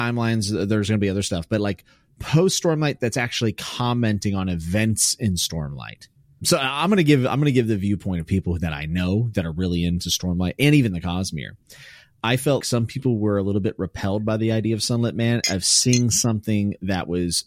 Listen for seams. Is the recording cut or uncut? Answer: cut